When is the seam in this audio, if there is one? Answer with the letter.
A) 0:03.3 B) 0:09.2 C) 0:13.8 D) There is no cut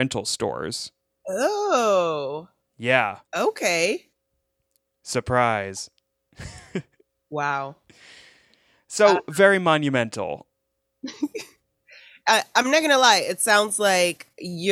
A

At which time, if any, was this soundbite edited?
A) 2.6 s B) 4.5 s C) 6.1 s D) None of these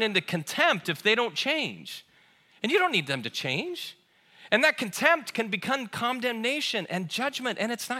D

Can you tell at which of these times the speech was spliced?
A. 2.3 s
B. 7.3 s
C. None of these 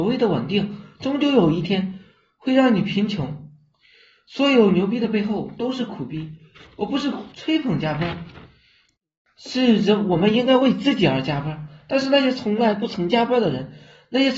B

